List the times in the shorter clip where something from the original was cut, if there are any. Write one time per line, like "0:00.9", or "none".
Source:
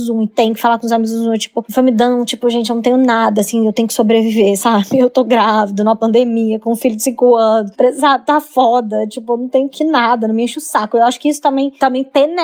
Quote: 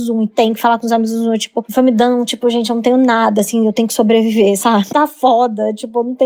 0:04.9